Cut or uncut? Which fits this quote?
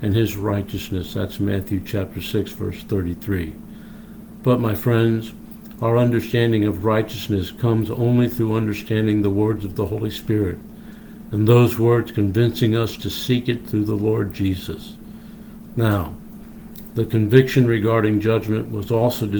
uncut